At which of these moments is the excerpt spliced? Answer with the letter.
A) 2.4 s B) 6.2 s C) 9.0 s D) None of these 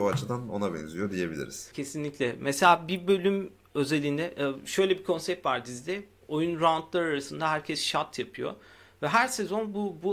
B